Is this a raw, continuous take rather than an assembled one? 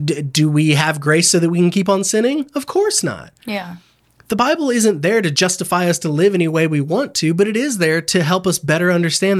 yes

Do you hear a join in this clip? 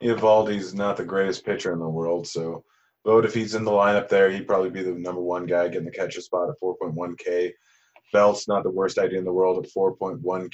no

